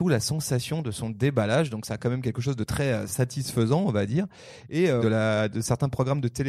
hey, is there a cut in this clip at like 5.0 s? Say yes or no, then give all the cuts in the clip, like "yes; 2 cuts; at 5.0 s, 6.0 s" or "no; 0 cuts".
yes; 1 cut; at 5.0 s